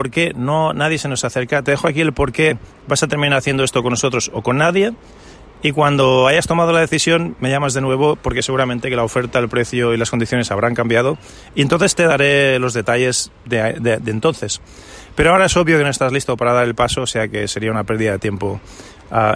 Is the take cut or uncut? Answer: uncut